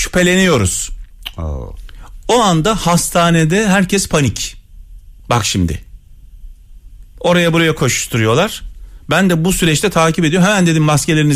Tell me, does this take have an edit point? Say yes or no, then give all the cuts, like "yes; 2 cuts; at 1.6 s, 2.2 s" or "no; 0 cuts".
yes; 1 cut; at 5.2 s